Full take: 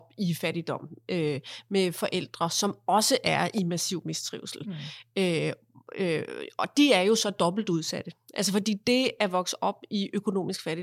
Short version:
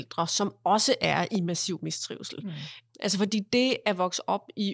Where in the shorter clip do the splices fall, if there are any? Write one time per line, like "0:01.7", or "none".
0:02.9